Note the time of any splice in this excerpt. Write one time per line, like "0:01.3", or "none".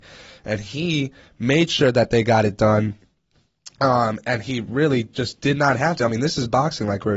none